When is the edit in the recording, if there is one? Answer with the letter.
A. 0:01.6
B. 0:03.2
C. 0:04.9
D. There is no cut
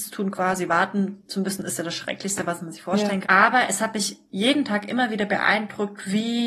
B